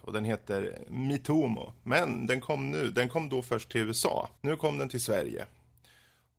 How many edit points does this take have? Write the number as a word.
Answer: one